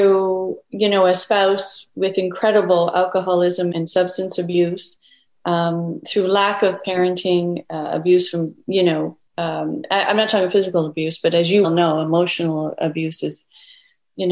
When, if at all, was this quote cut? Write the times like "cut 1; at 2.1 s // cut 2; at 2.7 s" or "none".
cut 1; at 3.7 s // cut 2; at 11.6 s